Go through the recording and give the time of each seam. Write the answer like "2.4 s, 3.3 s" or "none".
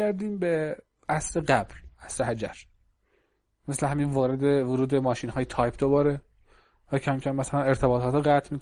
none

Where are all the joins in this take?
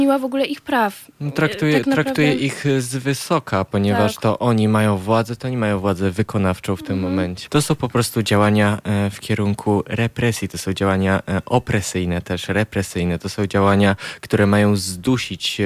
7.5 s

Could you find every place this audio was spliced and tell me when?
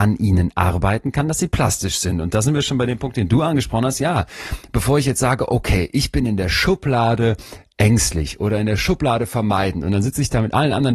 none

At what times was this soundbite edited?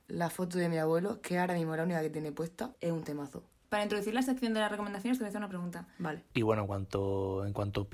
2.7 s, 6.3 s

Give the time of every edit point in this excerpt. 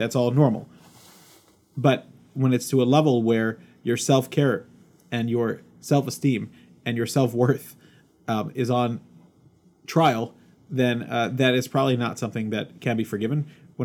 none

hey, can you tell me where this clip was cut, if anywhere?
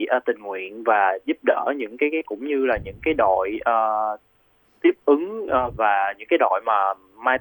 2.2 s, 5.8 s

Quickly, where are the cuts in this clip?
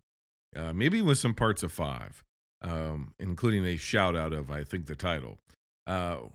none

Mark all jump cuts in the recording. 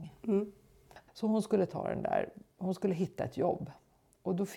1.1 s

